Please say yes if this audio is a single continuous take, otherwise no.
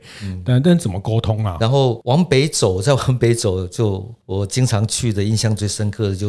no